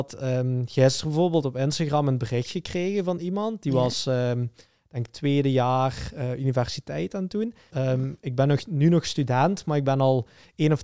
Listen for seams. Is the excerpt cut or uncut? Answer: cut